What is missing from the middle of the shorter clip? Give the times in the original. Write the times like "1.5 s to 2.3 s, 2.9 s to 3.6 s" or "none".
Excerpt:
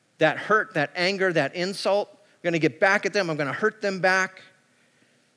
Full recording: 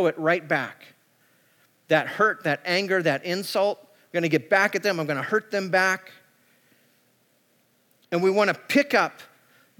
none